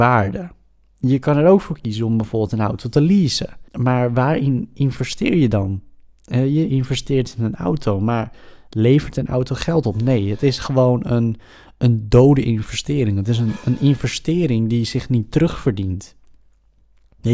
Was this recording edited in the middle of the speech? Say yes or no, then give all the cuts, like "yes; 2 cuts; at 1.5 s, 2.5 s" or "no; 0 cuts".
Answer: yes; 1 cut; at 3.7 s